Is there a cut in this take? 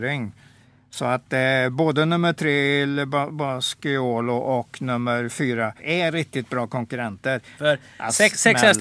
yes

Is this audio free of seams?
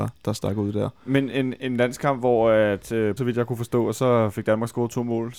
no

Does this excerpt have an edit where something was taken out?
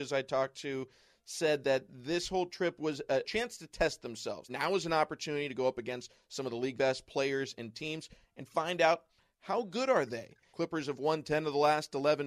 yes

